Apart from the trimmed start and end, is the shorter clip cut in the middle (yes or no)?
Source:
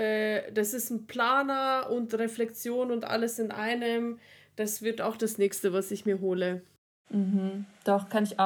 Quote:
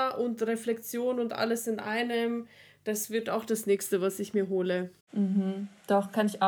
yes